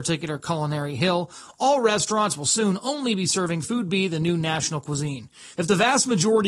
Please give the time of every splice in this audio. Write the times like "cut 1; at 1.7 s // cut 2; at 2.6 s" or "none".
cut 1; at 5.5 s